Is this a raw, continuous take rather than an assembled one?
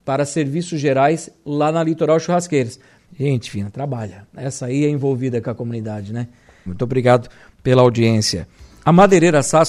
no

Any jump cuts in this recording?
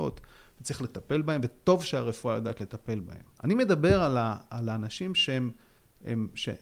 yes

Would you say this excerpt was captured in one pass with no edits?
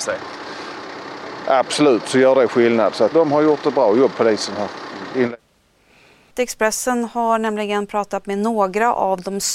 no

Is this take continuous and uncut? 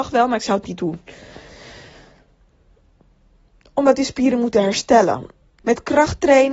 no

